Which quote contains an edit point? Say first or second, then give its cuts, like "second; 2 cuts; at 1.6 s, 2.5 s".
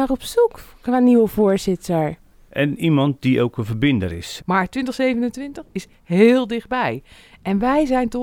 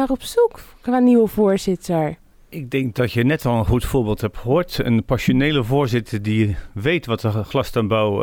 first; 2 cuts; at 2.5 s, 4.4 s